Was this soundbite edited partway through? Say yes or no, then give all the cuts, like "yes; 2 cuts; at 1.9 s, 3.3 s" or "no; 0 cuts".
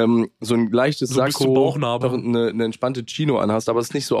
yes; 1 cut; at 2.0 s